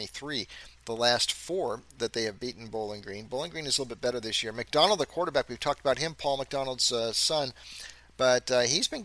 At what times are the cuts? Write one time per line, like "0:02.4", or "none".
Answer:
none